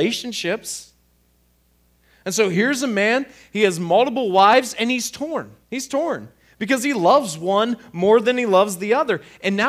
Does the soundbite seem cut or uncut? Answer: cut